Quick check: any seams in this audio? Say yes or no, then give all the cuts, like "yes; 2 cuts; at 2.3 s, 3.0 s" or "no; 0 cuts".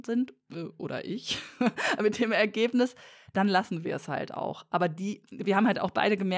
no; 0 cuts